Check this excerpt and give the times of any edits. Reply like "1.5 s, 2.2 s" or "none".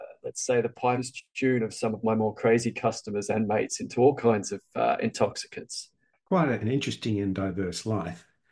none